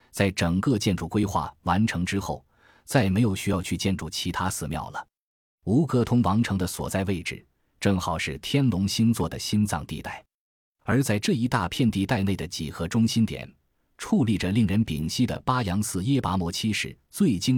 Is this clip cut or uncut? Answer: uncut